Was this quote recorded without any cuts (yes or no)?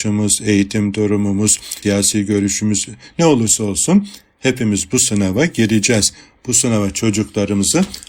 no